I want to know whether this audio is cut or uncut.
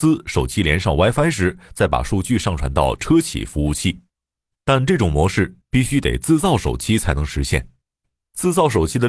cut